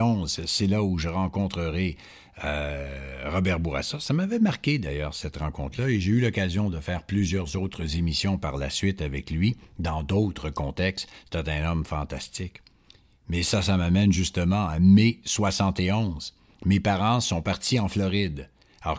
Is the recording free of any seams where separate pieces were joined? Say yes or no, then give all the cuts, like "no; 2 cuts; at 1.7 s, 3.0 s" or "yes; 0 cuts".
yes; 0 cuts